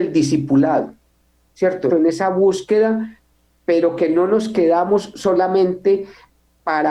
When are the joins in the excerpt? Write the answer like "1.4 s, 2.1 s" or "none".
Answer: 1.9 s